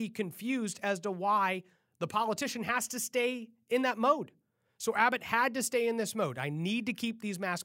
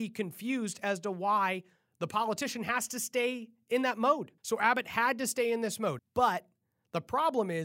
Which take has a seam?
second; 2 cuts; at 4.4 s, 6.0 s

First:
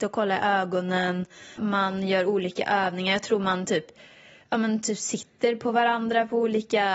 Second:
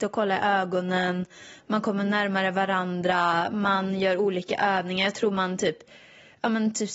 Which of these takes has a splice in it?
first; 1 cut; at 1.6 s

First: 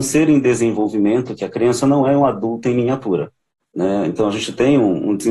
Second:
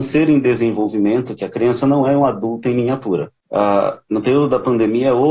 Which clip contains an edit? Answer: second; 1 cut; at 3.4 s

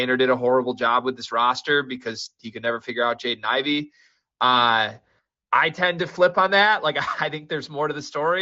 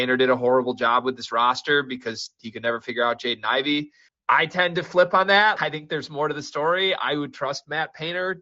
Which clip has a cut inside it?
second; 2 cuts; at 4.1 s, 5.6 s

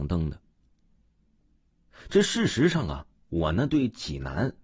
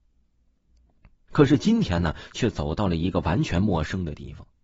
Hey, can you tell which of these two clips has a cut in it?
second; 1 cut; at 1.3 s

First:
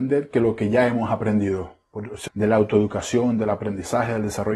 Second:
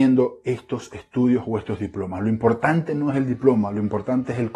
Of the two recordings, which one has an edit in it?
first; 1 cut; at 2.3 s

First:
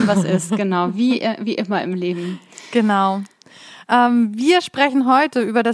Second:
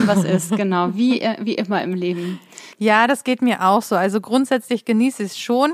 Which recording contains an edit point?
second; 1 cut; at 2.7 s

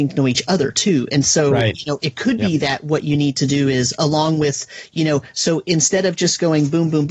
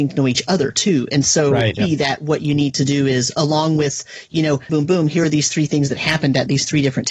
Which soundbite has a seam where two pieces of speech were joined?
second; 2 cuts; at 1.8 s, 4.7 s

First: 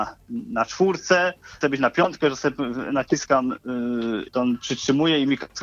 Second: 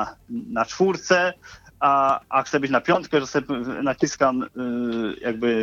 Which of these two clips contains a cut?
first; 2 cuts; at 1.6 s, 4.3 s

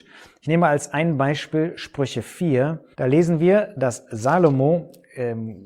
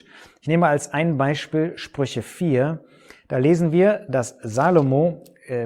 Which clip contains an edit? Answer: first; 1 cut; at 2.9 s

